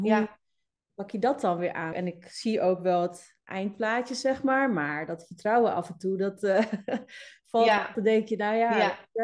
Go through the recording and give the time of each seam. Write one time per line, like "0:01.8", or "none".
0:01.9
0:07.9